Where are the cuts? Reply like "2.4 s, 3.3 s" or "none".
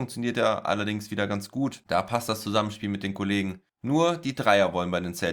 none